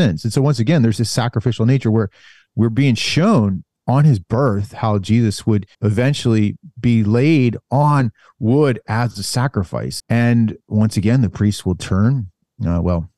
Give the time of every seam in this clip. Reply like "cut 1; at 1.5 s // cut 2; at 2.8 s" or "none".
cut 1; at 5.7 s // cut 2; at 10.0 s